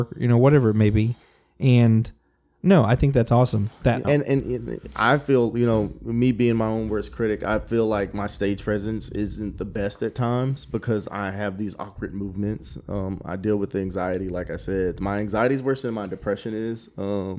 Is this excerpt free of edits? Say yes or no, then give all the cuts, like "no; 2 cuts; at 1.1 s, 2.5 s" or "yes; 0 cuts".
no; 1 cut; at 4.0 s